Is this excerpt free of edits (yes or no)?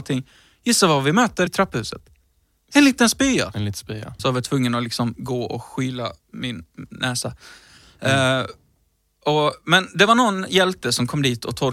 no